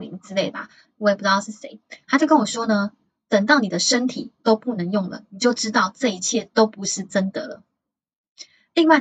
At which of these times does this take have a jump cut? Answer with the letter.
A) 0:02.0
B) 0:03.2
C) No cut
A